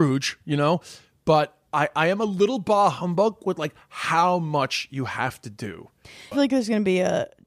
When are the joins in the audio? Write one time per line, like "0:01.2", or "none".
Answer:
0:06.3